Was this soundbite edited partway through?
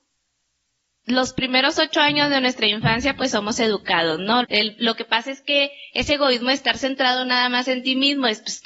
yes; 1 cut; at 4.4 s

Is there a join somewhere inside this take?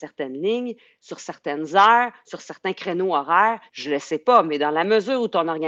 yes; 1 cut; at 3.7 s

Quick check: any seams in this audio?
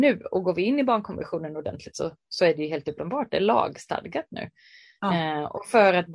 no; 0 cuts

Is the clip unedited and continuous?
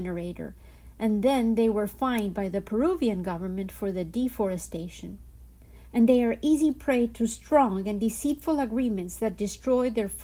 no; 1 cut; at 5.9 s

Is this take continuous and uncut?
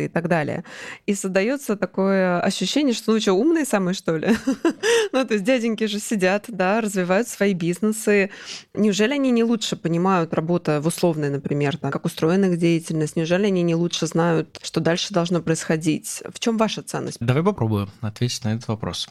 no; 2 cuts; at 11.9 s, 17.2 s

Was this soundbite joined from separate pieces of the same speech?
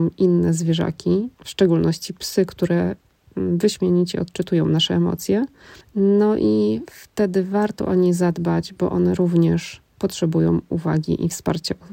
no; 0 cuts

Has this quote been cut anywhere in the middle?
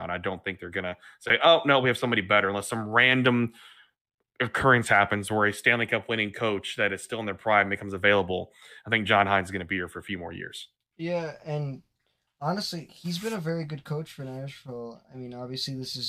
no; 0 cuts

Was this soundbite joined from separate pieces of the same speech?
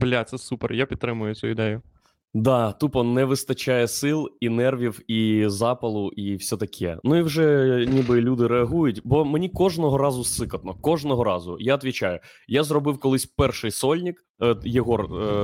no; 0 cuts

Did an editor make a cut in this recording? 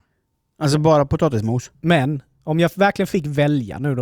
yes; 1 cut; at 1.7 s

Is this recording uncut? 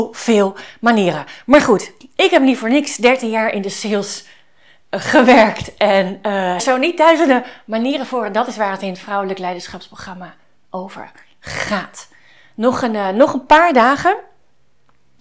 no; 1 cut; at 6.6 s

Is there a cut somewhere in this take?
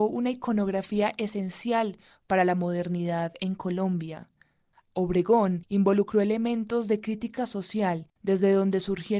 no; 0 cuts

